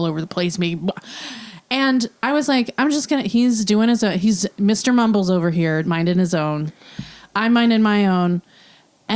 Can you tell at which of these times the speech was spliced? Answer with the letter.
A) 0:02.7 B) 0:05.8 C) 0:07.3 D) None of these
B